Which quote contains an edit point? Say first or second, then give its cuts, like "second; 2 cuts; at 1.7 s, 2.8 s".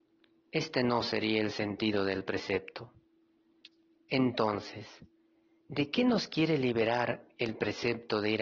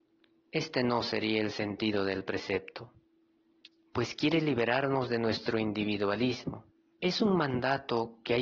second; 2 cuts; at 3.9 s, 6.9 s